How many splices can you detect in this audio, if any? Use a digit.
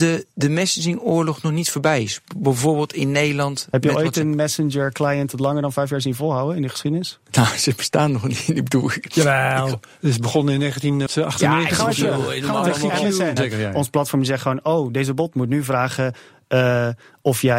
2